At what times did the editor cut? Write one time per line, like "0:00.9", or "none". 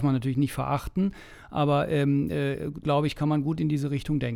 0:02.8